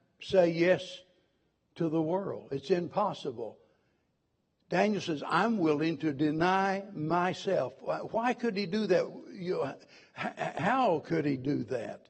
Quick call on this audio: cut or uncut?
uncut